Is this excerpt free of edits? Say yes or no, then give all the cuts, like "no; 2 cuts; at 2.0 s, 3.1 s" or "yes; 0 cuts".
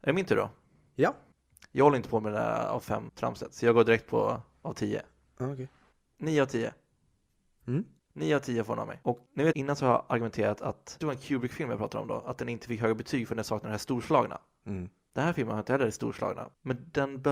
yes; 0 cuts